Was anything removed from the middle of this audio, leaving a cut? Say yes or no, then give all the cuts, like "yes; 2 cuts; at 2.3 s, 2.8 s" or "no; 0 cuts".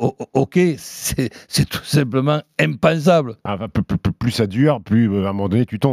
yes; 1 cut; at 3.5 s